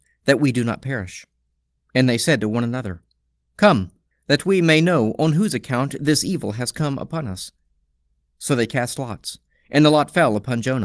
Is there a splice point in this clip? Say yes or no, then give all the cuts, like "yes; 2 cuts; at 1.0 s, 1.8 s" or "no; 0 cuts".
yes; 1 cut; at 4.1 s